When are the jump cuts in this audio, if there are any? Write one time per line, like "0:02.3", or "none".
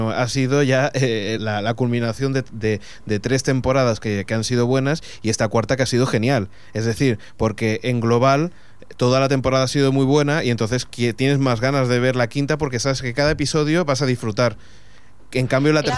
0:01.4